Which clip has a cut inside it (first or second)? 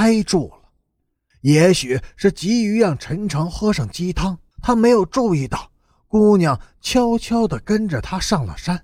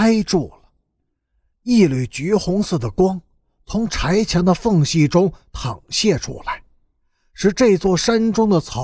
first